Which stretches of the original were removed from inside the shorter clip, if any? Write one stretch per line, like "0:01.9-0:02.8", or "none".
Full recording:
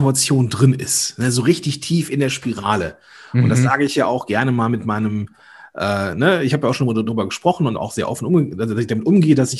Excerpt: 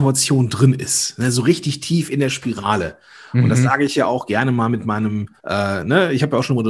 0:05.4-0:05.7